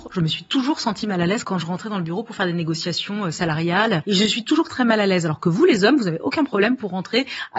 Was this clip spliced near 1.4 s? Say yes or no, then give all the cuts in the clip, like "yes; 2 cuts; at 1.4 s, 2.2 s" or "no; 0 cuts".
yes; 1 cut; at 1.4 s